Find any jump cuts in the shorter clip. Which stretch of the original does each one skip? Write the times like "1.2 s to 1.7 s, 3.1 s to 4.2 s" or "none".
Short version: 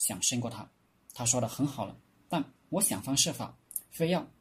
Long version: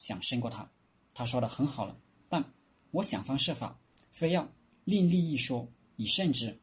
2.6 s to 2.8 s